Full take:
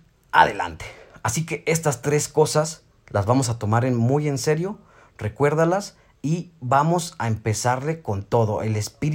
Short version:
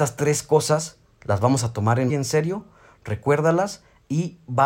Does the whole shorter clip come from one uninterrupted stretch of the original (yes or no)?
no